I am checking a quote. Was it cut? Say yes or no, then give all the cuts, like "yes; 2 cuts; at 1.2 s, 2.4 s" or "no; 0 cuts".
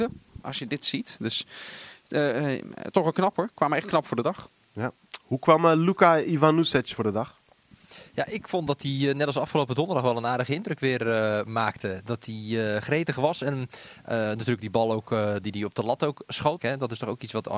yes; 1 cut; at 16.6 s